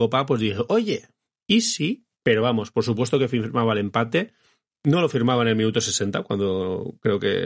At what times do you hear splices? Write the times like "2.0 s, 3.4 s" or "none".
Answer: 2.2 s